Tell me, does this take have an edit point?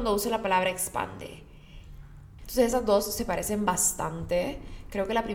yes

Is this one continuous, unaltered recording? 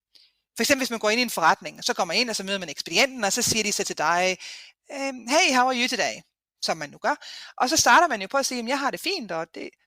yes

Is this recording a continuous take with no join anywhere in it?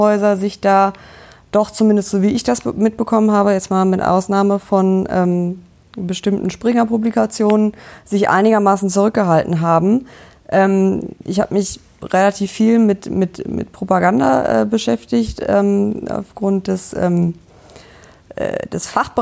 yes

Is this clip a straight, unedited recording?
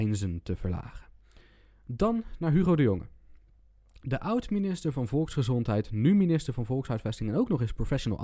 yes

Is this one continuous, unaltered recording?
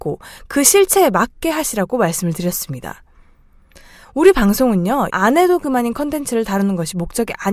no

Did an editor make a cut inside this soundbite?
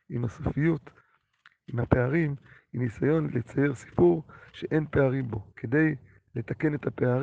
yes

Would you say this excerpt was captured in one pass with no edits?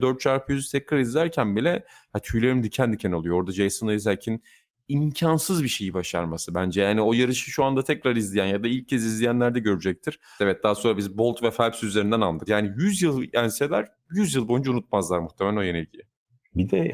no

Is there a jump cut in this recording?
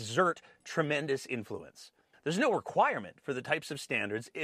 yes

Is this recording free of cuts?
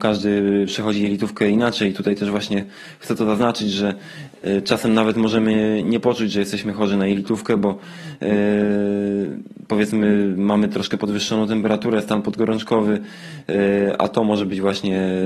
yes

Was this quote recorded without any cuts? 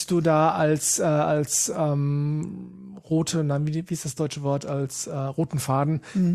yes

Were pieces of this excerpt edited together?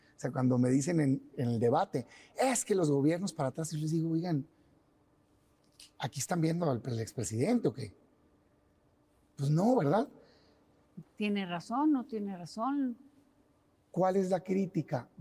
yes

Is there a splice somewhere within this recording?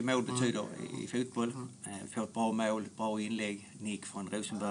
no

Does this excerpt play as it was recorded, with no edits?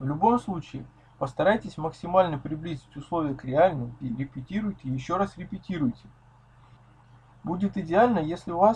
no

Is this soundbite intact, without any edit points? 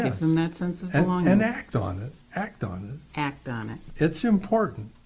yes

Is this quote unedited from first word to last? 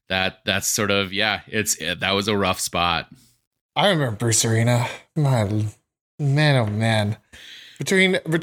no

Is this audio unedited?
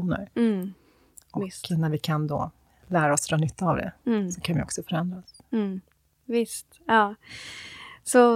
yes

